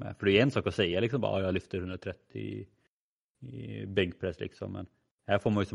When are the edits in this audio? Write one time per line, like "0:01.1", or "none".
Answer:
none